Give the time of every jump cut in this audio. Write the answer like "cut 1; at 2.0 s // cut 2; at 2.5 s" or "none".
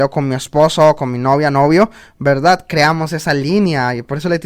none